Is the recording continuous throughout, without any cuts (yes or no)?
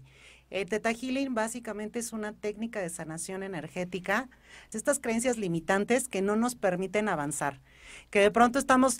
no